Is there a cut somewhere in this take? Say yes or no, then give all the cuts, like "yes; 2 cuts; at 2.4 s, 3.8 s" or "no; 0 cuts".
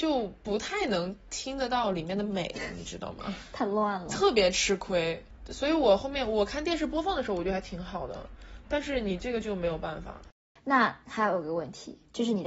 no; 0 cuts